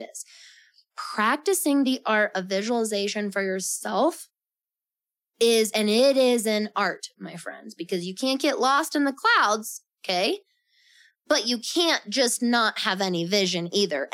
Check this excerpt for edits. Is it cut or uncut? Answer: uncut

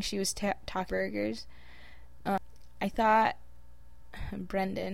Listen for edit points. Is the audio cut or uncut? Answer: uncut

